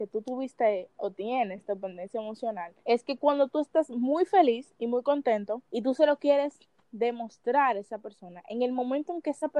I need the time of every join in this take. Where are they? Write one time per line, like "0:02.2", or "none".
0:02.8
0:05.7